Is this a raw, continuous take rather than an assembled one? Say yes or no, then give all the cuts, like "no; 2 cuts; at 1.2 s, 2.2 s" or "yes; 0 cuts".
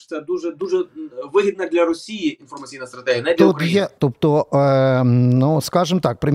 no; 1 cut; at 4.0 s